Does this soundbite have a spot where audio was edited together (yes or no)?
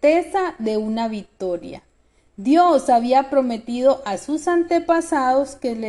no